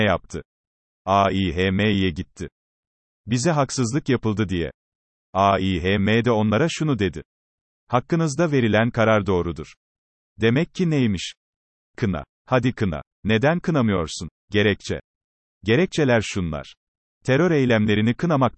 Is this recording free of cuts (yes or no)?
no